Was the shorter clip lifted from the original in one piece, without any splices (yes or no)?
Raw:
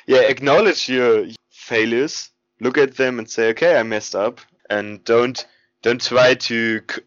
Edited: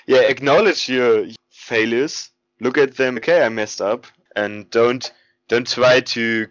no